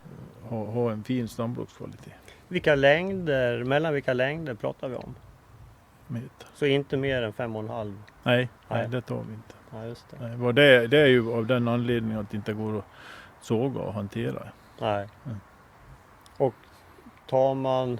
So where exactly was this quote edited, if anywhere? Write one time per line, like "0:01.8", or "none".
0:06.1